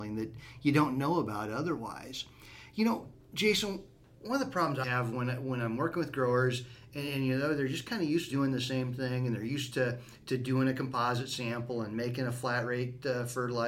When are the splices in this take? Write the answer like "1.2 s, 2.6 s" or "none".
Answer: 4.8 s, 8.3 s